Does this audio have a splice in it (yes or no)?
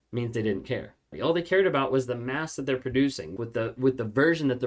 yes